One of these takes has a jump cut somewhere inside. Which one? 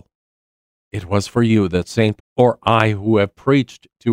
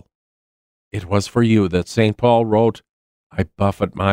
first; 1 cut; at 2.2 s

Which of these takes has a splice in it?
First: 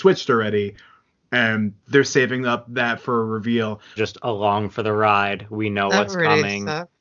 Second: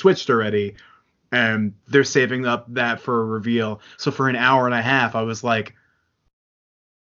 first; 1 cut; at 4.0 s

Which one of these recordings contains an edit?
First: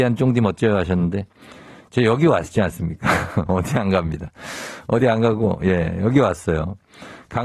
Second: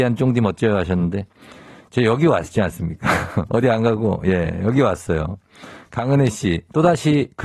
second; 1 cut; at 3.5 s

